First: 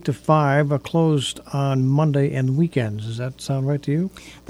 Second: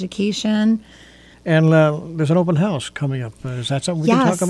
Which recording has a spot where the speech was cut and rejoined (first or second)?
second